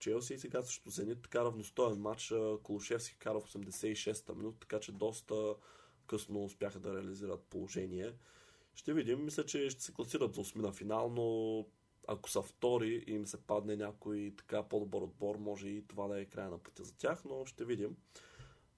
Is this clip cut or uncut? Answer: uncut